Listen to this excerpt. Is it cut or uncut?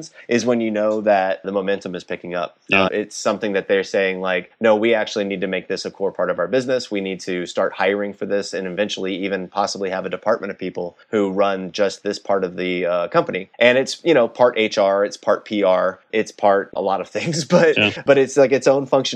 cut